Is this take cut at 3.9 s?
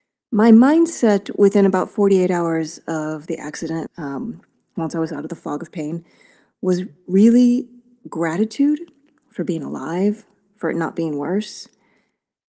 yes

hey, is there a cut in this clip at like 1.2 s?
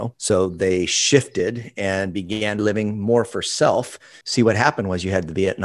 no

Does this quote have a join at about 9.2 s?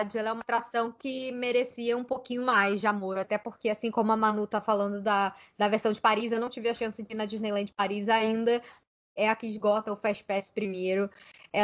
yes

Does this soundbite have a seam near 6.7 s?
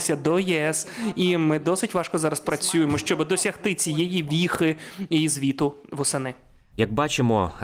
yes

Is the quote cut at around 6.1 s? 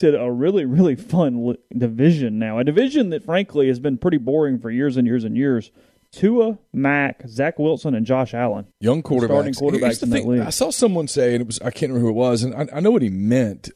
no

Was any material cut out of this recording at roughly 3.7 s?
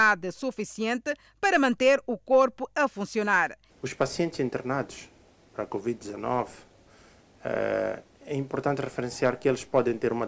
yes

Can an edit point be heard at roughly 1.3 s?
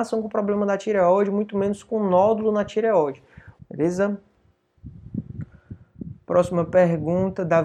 no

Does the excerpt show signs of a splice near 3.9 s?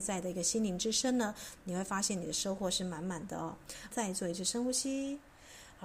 yes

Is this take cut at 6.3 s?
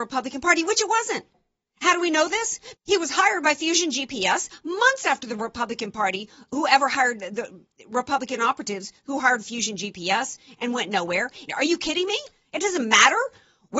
no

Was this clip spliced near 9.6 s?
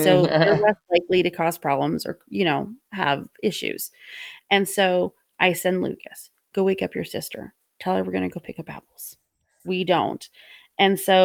yes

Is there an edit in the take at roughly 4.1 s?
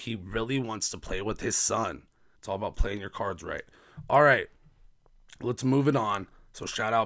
no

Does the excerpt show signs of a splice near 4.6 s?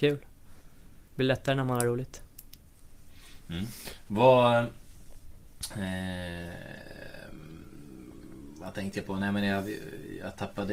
no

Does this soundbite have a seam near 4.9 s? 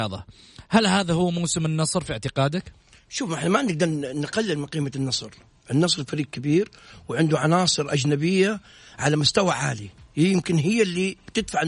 no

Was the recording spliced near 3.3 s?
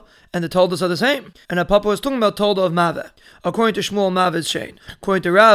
no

